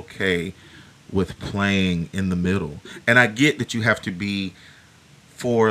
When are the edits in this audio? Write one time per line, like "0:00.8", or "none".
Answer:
none